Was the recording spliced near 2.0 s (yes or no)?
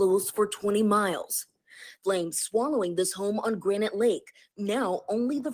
yes